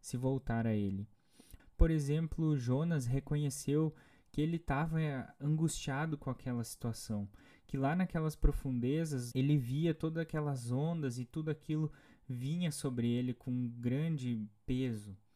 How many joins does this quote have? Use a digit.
2